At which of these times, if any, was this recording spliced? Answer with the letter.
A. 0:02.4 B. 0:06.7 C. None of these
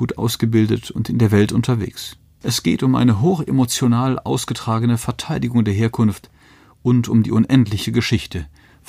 A